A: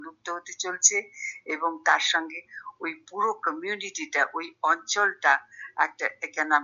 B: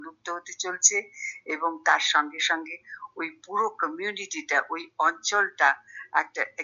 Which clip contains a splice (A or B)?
A